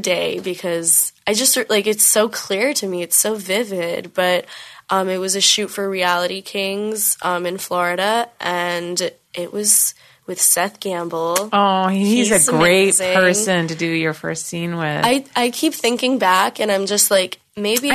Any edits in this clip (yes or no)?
no